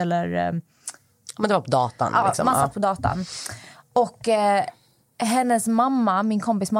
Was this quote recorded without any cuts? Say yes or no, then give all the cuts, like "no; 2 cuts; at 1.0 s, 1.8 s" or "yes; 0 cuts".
yes; 0 cuts